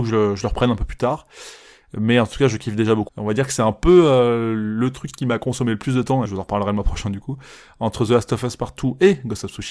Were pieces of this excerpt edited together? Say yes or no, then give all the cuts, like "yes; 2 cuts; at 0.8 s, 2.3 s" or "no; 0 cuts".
yes; 2 cuts; at 3.1 s, 6.3 s